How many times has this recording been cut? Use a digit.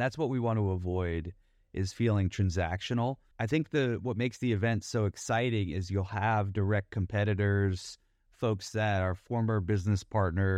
1